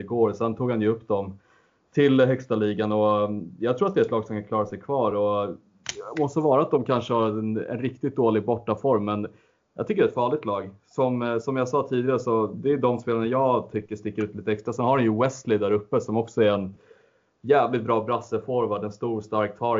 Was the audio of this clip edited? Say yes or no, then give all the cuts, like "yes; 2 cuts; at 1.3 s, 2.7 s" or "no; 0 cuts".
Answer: no; 0 cuts